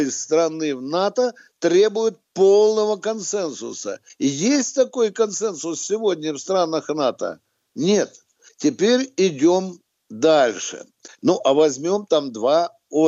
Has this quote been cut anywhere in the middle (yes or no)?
yes